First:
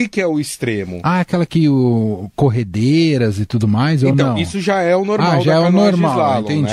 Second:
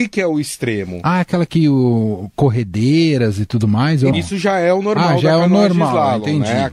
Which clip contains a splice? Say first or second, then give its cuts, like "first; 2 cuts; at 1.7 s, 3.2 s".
second; 1 cut; at 4.1 s